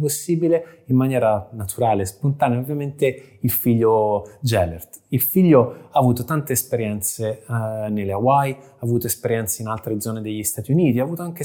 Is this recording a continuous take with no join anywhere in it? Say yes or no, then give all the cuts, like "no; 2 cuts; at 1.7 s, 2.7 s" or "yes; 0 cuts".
yes; 0 cuts